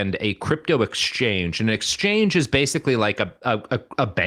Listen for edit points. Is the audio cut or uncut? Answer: uncut